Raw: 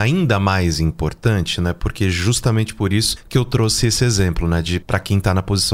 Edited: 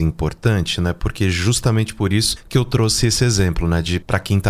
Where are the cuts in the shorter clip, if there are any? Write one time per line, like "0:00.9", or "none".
none